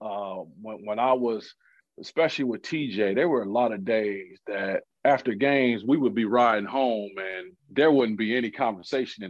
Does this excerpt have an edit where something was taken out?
no; 0 cuts

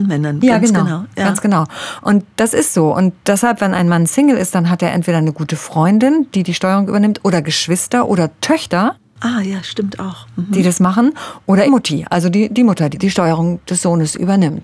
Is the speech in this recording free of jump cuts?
no; 2 cuts; at 11.7 s, 12.9 s

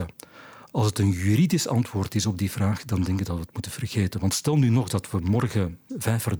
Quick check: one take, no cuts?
yes; 0 cuts

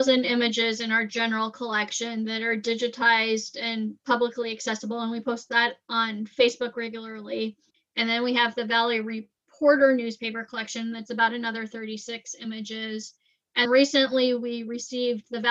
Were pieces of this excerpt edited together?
yes; 2 cuts; at 7.7 s, 13.7 s

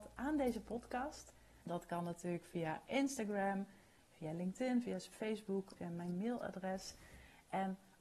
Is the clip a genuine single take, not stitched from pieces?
no; 2 cuts; at 1.6 s, 5.8 s

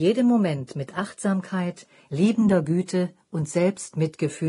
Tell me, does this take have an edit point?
no; 0 cuts

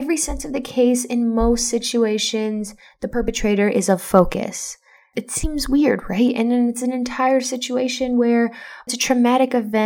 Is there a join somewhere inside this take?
no; 0 cuts

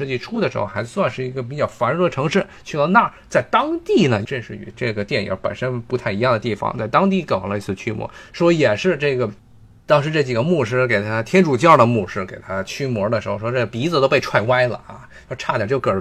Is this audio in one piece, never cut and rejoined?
no; 1 cut; at 4.2 s

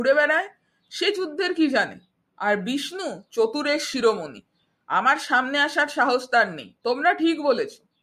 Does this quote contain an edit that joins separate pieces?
yes; 1 cut; at 6.8 s

